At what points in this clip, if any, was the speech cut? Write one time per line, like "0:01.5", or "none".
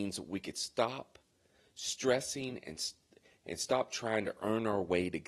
none